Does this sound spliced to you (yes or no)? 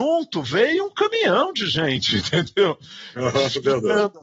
no